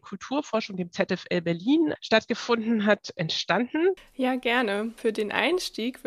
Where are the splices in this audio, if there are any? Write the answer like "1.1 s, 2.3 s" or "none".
2.0 s, 4.0 s